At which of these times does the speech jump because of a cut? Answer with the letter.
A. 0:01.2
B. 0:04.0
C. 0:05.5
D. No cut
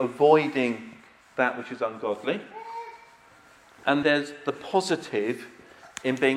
B